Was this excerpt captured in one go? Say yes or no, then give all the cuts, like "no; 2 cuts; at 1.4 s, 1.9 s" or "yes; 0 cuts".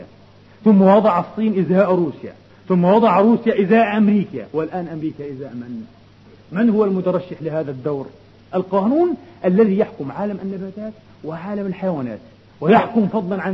no; 1 cut; at 8.5 s